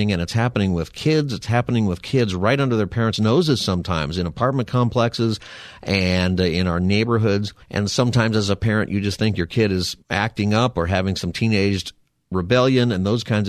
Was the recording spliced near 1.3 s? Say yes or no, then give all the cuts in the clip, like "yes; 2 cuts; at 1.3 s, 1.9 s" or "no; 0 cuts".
no; 2 cuts; at 7.6 s, 10.0 s